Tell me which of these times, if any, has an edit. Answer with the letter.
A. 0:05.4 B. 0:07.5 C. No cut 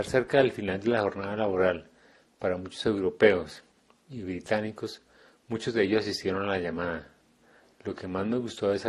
C